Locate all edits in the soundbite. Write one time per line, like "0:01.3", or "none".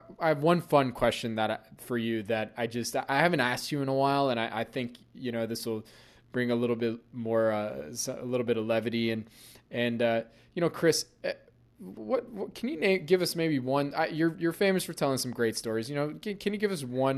none

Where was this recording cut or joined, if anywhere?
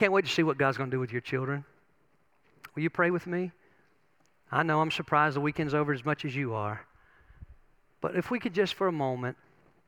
0:02.7

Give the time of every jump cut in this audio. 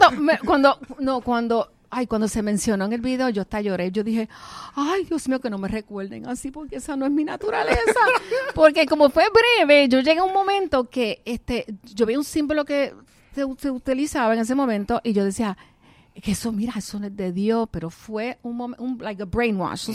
none

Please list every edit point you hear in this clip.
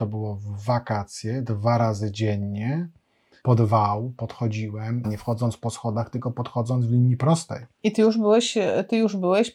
0:03.4
0:05.0
0:07.7

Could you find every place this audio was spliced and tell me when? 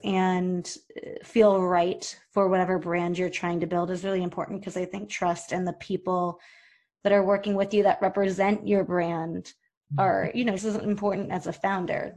0:10.6

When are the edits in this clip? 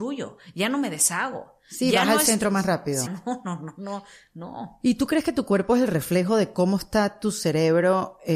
0:03.1

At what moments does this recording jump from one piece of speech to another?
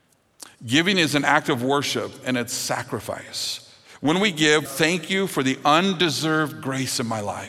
0:04.7

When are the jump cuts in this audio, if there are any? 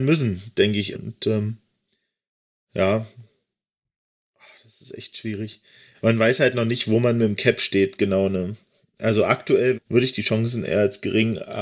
0:00.9
0:09.7

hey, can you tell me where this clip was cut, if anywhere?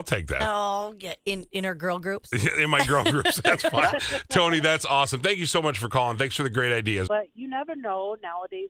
0:07.1

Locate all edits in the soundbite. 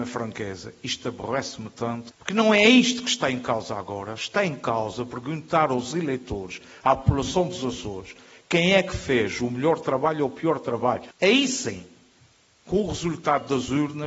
0:11.1

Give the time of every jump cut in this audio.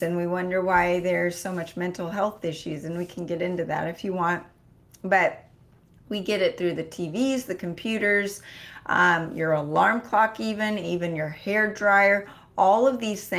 none

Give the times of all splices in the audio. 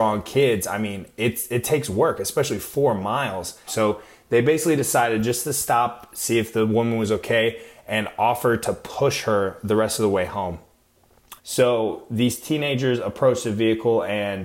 0:03.7
0:11.4

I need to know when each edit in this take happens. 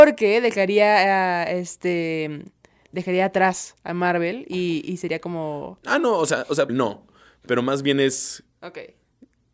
0:06.7
0:08.5

